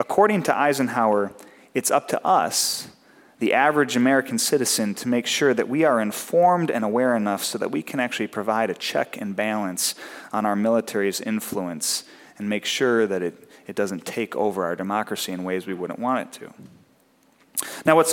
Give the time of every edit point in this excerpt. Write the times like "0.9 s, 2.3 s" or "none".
none